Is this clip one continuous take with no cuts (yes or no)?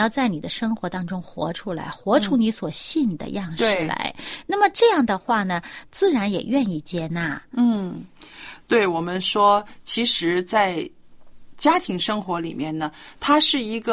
no